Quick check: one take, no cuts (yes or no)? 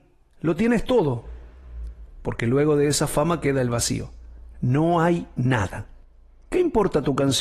no